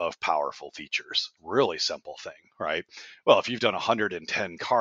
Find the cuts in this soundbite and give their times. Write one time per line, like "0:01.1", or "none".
0:01.4